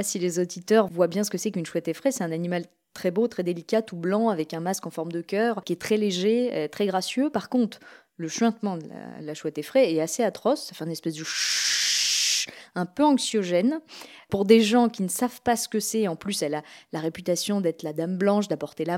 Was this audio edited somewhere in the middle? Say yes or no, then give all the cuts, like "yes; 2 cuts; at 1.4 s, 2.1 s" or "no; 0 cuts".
no; 0 cuts